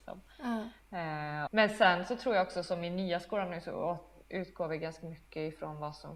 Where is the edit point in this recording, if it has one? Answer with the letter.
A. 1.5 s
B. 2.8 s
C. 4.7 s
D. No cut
A